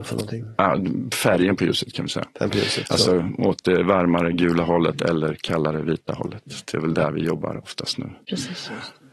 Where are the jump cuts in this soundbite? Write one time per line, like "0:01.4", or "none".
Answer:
none